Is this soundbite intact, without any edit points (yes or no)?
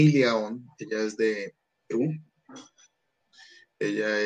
yes